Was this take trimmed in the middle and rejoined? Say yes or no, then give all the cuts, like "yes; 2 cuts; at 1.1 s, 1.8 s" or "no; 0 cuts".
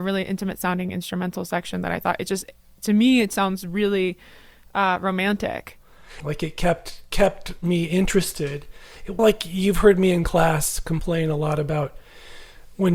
yes; 2 cuts; at 6.2 s, 9.2 s